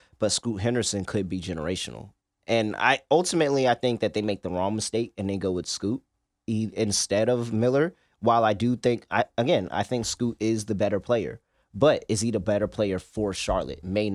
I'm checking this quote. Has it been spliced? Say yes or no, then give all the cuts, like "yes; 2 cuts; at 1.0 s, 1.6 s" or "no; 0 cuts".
no; 0 cuts